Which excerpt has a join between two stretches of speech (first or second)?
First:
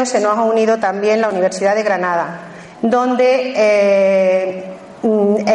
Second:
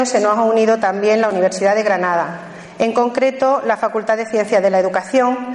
first